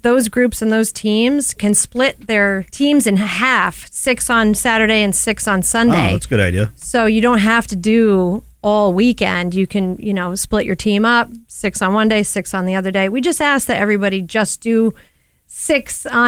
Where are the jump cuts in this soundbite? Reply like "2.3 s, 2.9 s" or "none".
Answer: none